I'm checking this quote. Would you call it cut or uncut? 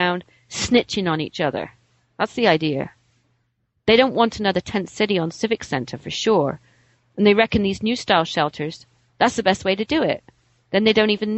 uncut